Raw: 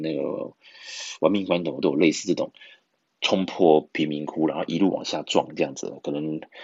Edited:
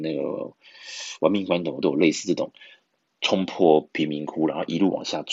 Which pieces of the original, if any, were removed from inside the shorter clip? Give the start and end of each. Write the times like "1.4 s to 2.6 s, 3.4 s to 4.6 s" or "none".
none